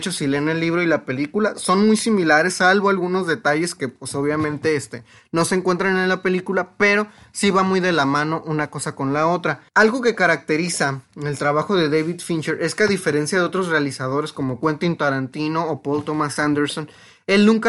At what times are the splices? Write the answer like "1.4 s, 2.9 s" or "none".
9.7 s